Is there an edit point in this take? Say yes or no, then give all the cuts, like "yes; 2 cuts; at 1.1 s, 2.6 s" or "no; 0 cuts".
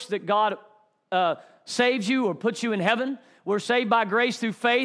no; 0 cuts